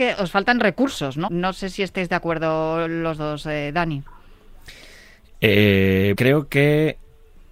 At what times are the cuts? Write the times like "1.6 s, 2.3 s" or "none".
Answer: 1.3 s, 6.1 s